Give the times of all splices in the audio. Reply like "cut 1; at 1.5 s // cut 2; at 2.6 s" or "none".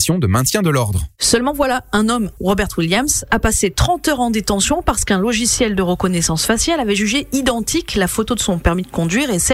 cut 1; at 2.3 s